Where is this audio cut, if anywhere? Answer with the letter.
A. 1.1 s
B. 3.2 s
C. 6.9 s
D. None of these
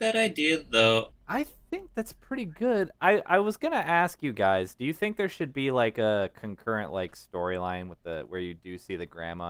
A